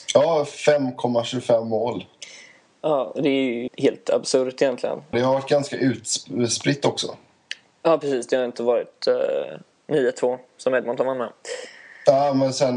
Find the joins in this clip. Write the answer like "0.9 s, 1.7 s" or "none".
3.7 s, 5.1 s, 9.9 s